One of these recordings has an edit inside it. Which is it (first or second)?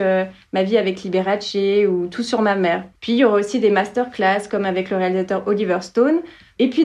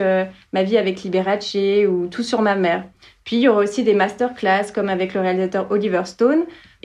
first